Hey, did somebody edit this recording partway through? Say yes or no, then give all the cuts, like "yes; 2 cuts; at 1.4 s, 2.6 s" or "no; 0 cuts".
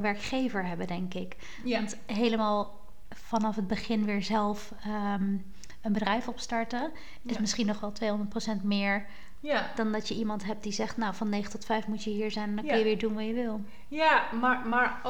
no; 0 cuts